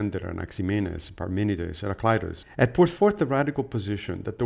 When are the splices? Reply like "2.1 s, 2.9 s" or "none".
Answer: 2.4 s